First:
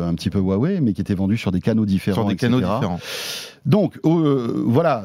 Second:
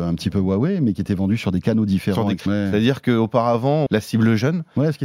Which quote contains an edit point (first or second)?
second